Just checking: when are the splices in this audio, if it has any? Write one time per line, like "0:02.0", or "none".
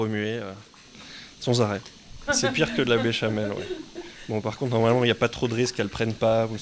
0:02.3